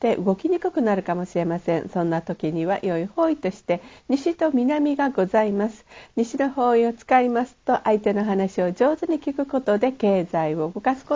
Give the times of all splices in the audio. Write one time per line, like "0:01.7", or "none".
none